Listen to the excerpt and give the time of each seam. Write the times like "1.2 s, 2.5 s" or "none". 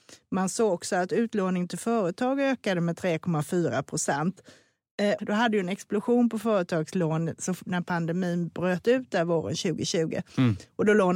5.2 s